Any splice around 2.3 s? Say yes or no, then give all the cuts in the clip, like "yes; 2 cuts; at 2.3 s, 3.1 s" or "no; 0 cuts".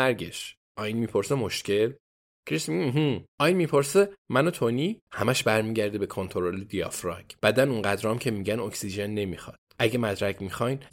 no; 1 cut; at 5.1 s